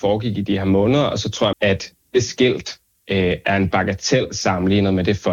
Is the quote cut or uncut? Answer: cut